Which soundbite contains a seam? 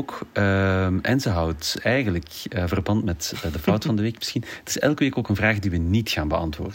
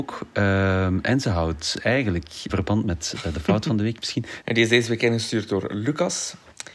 second; 2 cuts; at 2.5 s, 4.4 s

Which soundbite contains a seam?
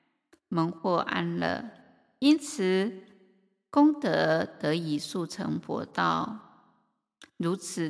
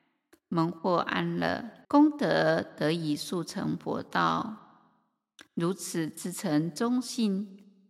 second; 1 cut; at 1.8 s

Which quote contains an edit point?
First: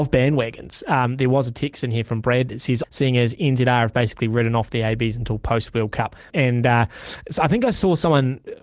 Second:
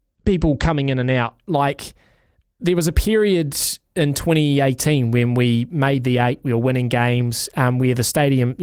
first; 2 cuts; at 2.8 s, 6.3 s

